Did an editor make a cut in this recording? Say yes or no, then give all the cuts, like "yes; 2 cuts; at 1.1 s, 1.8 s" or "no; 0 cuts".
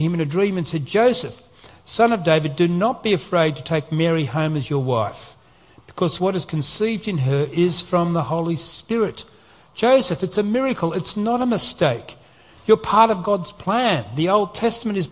no; 0 cuts